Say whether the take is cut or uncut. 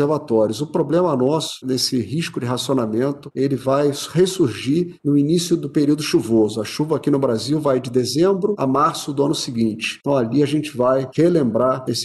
cut